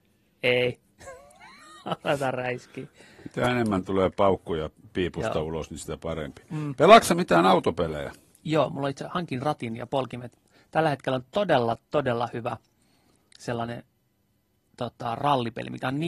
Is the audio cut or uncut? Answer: uncut